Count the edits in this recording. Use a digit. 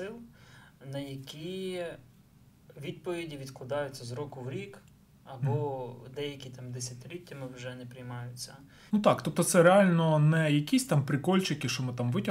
1